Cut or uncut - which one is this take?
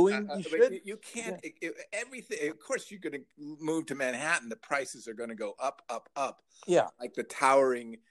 uncut